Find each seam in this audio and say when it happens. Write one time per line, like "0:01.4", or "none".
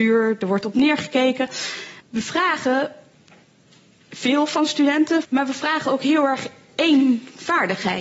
0:02.0
0:05.2